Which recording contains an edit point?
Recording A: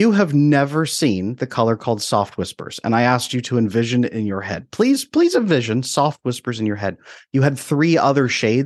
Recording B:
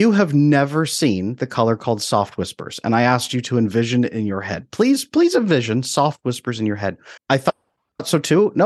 B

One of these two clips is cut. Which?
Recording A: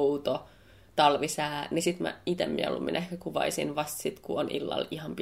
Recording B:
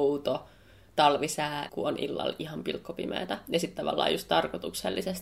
B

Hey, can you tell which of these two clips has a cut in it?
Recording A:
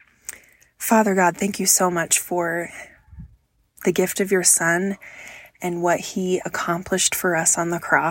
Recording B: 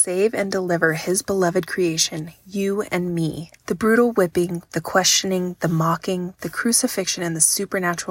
B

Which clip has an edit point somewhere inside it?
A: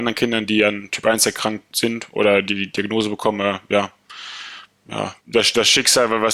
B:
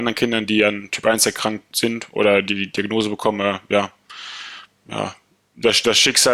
A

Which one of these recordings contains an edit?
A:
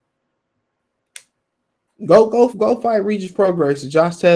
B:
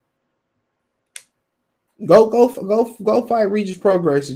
A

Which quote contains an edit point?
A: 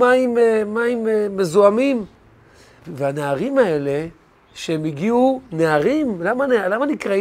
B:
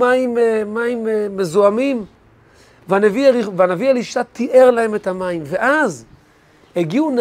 A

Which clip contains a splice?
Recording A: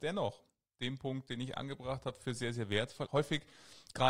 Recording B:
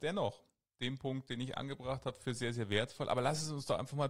A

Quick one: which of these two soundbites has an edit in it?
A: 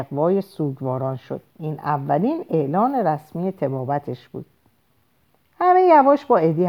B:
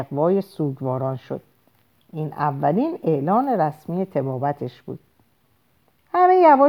A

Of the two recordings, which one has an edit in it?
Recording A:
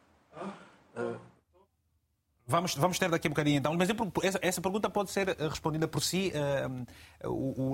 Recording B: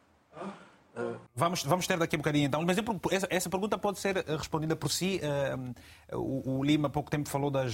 B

